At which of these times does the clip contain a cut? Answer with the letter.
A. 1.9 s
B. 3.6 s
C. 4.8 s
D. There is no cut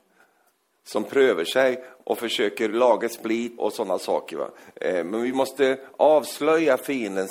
B